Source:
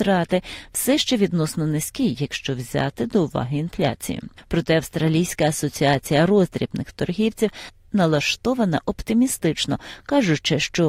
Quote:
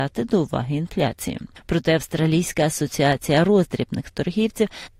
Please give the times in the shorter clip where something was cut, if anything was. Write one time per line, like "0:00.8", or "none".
none